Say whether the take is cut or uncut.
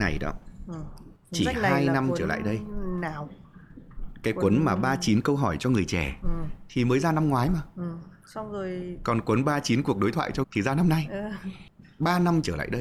cut